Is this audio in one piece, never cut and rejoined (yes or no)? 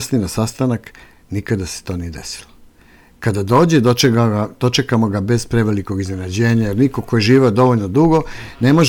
yes